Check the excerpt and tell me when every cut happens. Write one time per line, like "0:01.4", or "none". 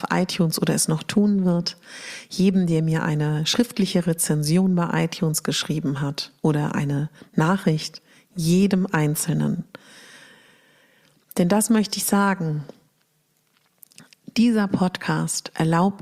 none